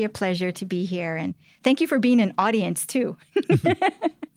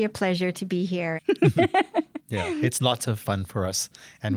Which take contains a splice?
second; 1 cut; at 1.2 s

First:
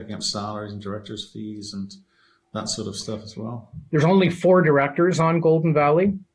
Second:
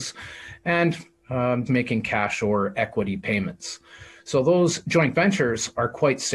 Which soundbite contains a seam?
second; 1 cut; at 1.7 s

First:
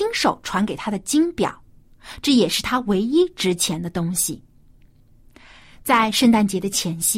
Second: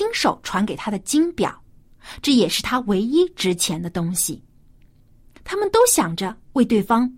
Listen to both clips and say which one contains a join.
second; 1 cut; at 5.4 s

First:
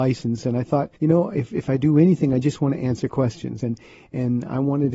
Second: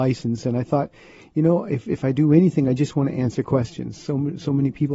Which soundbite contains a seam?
first; 2 cuts; at 1.0 s, 3.6 s

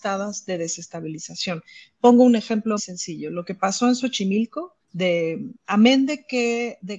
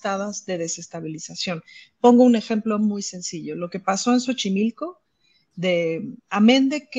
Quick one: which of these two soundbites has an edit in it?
first; 2 cuts; at 2.8 s, 4.8 s

